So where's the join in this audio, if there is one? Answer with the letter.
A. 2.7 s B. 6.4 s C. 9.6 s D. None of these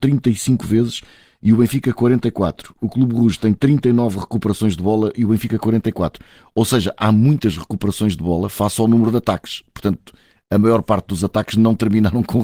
D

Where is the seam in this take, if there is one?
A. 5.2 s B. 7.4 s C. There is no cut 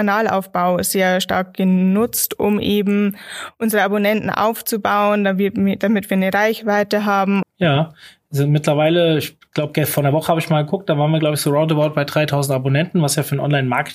B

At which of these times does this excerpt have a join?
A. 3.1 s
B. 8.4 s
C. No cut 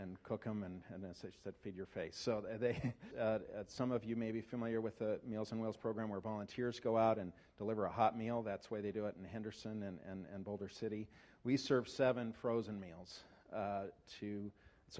A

